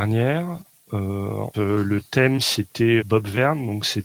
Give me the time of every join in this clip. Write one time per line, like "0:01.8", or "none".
0:01.5
0:03.0